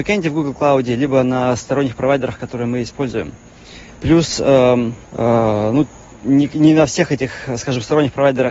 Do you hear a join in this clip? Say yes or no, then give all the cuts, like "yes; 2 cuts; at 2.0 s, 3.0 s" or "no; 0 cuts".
yes; 2 cuts; at 3.9 s, 5.0 s